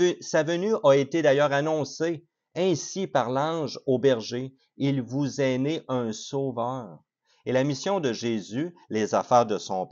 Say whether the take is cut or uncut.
uncut